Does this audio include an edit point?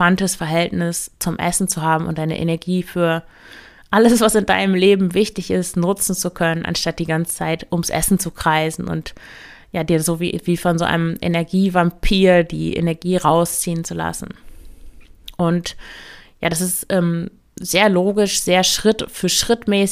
no; 0 cuts

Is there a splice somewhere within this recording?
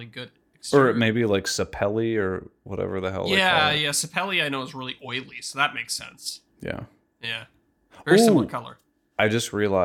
no; 0 cuts

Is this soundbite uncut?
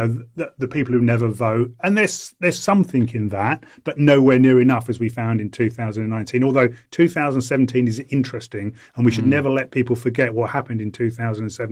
yes; 0 cuts

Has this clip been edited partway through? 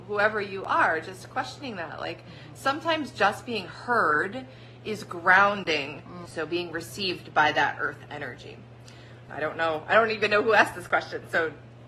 yes; 2 cuts; at 6.3 s, 9.3 s

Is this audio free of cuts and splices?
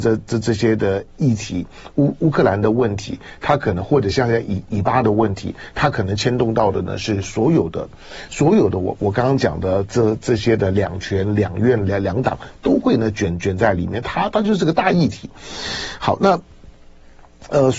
yes; 0 cuts

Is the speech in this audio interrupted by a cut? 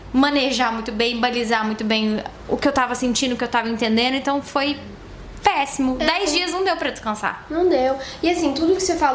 no; 0 cuts

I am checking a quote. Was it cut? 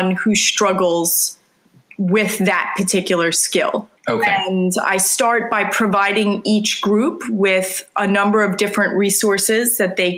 yes; 1 cut; at 4.0 s

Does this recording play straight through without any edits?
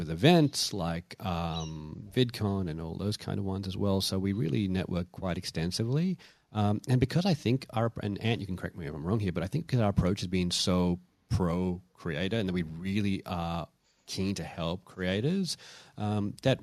yes; 0 cuts

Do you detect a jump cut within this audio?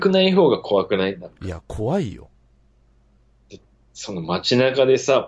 no; 0 cuts

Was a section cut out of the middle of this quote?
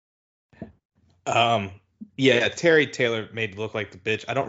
yes; 1 cut; at 2.1 s

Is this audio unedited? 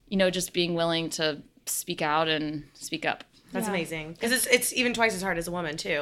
yes; 0 cuts

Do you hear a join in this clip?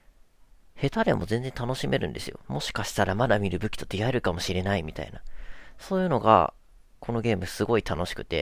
yes; 1 cut; at 2.4 s

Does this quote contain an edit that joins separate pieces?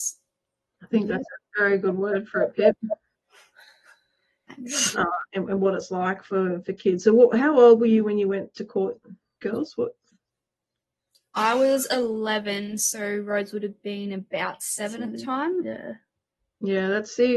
yes; 1 cut; at 4.9 s

